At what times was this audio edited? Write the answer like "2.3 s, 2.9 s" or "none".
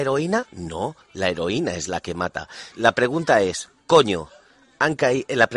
2.7 s